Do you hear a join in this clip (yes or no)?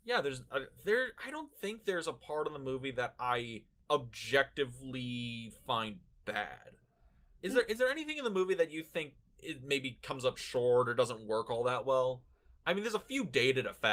no